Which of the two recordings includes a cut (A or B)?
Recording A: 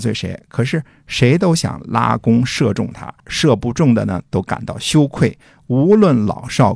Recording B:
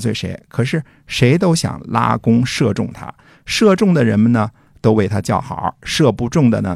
A